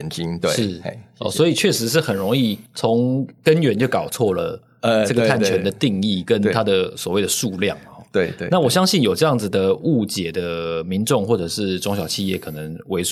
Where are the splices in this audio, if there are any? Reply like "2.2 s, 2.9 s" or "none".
none